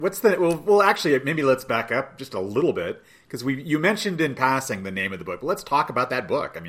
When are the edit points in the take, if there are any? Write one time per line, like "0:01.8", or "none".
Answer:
none